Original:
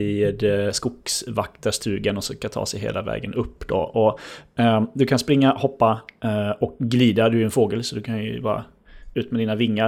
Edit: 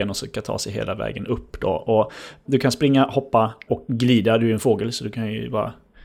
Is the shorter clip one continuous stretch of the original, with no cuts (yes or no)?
no